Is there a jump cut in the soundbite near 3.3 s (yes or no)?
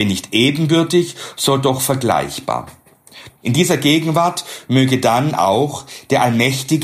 yes